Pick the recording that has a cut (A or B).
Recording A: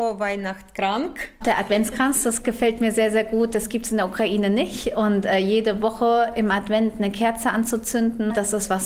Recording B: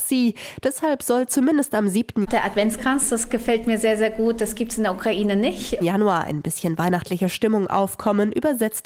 B